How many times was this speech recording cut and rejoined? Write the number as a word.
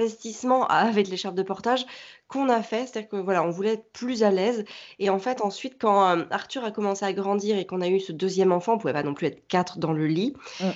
zero